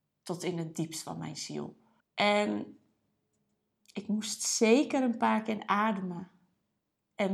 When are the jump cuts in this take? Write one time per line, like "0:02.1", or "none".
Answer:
0:02.0